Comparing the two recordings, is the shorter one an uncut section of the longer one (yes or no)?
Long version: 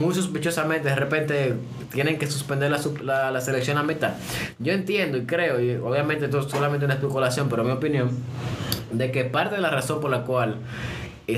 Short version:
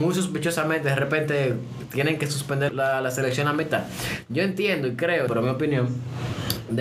no